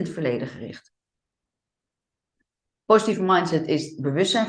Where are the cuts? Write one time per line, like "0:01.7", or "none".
none